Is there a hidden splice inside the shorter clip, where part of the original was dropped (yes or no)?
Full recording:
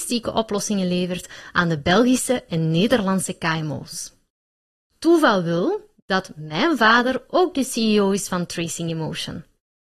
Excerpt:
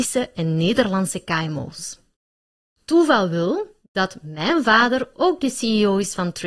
no